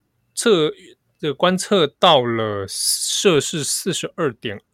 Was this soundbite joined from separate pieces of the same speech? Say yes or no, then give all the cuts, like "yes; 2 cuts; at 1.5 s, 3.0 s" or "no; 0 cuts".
no; 0 cuts